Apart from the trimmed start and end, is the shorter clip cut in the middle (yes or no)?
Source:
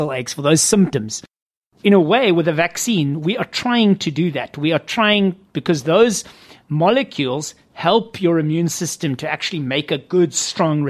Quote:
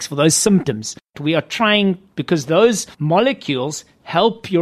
yes